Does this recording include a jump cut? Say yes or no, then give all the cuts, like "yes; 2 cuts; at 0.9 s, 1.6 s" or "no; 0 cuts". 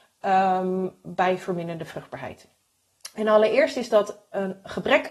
no; 0 cuts